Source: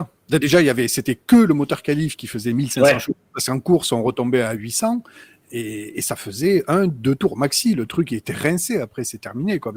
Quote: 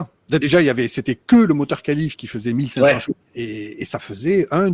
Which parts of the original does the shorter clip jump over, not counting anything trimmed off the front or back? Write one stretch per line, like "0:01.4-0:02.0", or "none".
0:03.2-0:05.4